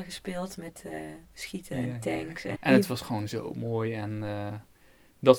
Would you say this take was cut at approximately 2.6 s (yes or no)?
yes